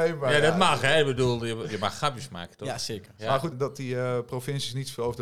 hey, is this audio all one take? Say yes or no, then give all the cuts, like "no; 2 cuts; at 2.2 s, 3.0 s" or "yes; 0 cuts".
no; 1 cut; at 3.5 s